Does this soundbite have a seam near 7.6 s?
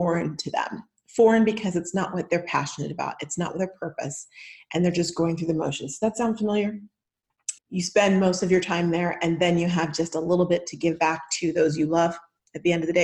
yes; 1 cut; at 7.6 s

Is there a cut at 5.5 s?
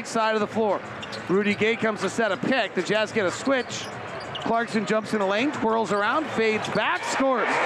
no; 0 cuts

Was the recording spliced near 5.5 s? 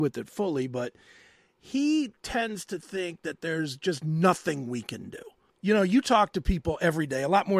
yes; 1 cut; at 5.5 s

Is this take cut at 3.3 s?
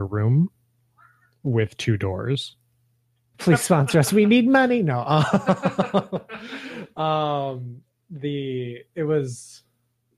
yes; 1 cut; at 3.3 s

